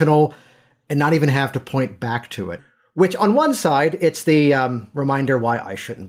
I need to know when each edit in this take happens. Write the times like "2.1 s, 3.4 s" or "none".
2.6 s